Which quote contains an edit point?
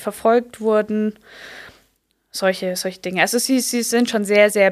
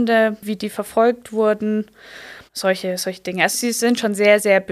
second; 2 cuts; at 2.5 s, 3.5 s

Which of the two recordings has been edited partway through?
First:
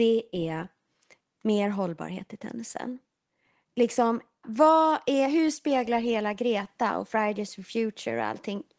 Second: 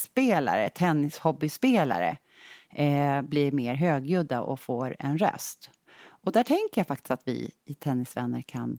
first; 1 cut; at 4.4 s

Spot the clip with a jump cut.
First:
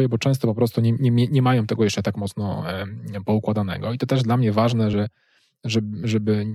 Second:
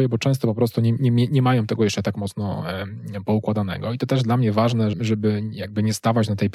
second; 1 cut; at 4.9 s

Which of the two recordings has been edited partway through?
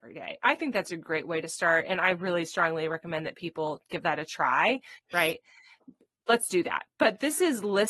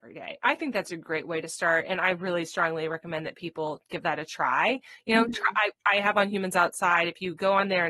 first; 1 cut; at 5.0 s

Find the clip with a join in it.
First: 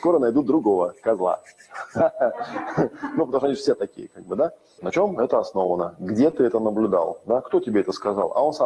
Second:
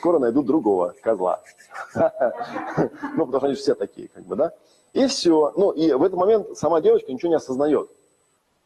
first; 1 cut; at 4.8 s

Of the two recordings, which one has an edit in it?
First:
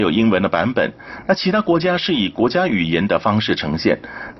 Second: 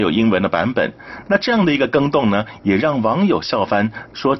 second; 1 cut; at 1.2 s

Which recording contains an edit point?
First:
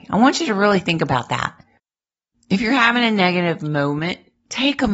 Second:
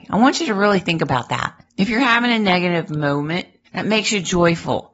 second; 2 cuts; at 1.7 s, 3.6 s

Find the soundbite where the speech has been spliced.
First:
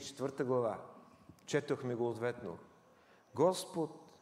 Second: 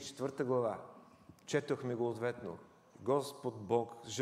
second; 1 cut; at 2.9 s

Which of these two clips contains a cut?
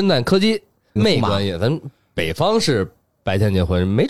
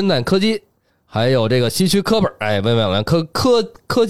first; 1 cut; at 1.0 s

